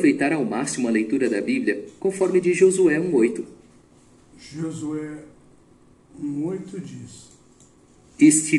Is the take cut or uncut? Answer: cut